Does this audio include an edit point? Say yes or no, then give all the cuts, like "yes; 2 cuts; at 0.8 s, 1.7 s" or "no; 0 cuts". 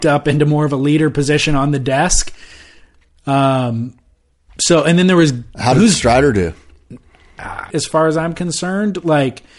yes; 1 cut; at 7.7 s